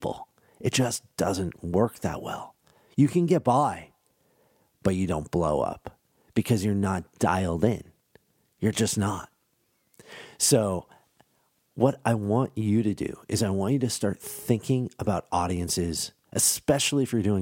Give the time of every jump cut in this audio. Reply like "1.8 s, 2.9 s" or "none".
none